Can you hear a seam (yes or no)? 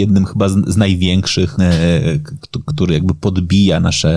yes